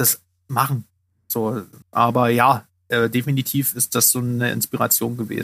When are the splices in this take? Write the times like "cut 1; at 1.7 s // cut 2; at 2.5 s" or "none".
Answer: cut 1; at 1.8 s